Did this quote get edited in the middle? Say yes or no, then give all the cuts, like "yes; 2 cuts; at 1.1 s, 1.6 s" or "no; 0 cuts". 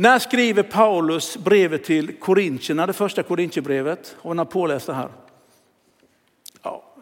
no; 0 cuts